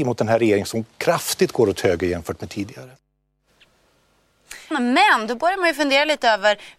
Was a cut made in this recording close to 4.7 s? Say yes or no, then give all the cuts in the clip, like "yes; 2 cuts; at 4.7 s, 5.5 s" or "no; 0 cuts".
yes; 1 cut; at 4.7 s